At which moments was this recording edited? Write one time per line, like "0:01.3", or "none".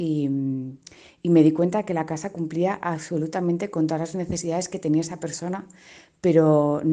none